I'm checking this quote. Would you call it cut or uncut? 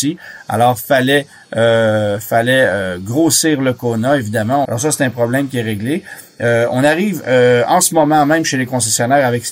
cut